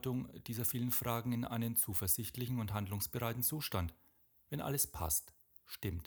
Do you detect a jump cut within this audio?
no; 0 cuts

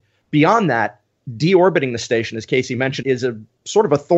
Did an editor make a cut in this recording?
yes; 1 cut; at 3.0 s

